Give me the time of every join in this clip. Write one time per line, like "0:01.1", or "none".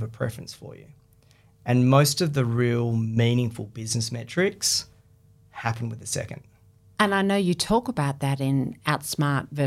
0:06.9